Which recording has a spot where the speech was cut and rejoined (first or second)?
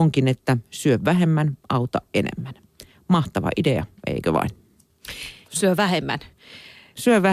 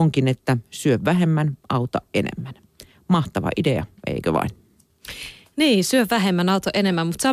first